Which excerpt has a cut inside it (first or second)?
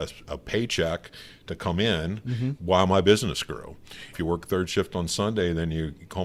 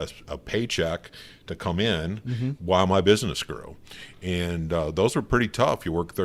first